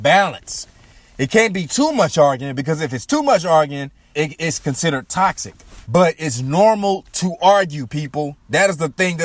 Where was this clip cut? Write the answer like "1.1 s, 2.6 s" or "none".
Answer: 4.1 s, 5.8 s